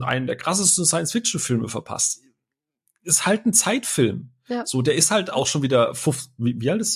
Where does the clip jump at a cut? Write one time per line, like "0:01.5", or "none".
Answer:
none